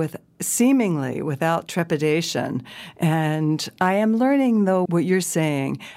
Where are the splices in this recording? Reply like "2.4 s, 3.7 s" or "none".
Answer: 4.9 s